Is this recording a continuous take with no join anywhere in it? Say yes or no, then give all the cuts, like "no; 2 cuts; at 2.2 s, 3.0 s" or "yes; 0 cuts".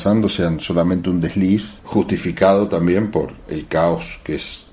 no; 1 cut; at 1.8 s